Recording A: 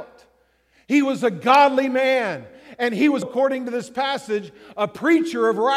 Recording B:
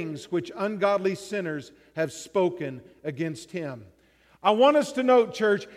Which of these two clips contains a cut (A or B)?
A